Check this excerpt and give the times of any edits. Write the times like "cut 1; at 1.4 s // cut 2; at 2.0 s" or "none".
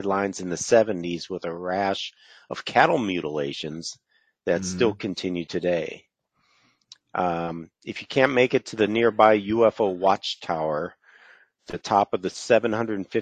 none